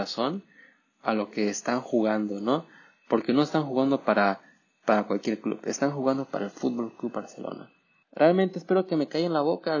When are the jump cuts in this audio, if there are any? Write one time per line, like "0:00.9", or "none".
0:08.0